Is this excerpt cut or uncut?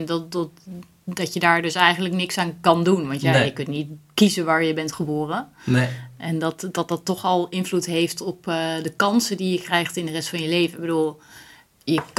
uncut